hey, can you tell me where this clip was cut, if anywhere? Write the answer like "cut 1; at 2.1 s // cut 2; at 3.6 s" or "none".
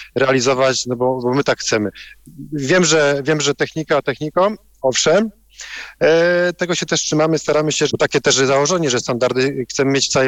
cut 1; at 7.9 s